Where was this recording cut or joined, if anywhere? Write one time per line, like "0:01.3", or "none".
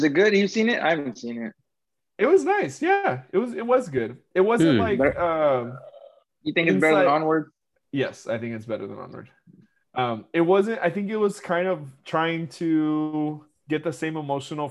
none